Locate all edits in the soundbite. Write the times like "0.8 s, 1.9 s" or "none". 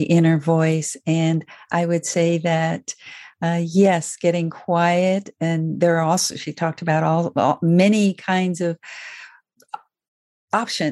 none